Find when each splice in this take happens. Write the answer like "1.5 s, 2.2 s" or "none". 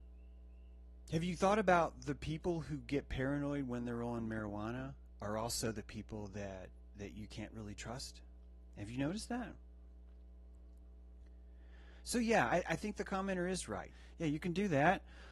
13.9 s